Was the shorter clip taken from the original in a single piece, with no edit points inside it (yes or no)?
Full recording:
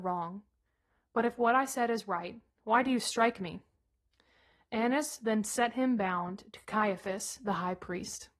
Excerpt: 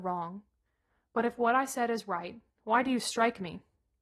yes